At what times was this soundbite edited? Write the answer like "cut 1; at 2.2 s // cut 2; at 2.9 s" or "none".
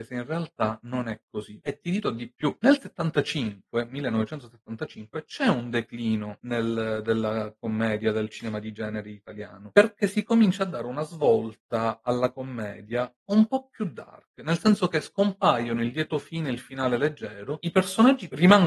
cut 1; at 13.2 s